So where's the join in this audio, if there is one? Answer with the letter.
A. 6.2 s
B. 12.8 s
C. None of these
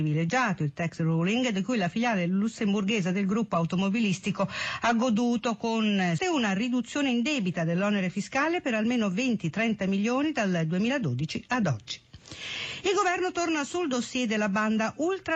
A